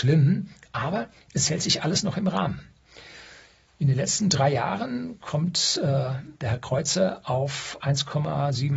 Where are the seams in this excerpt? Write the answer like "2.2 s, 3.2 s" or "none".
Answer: none